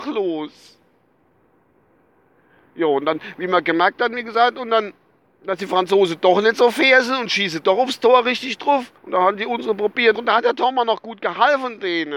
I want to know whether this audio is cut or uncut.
cut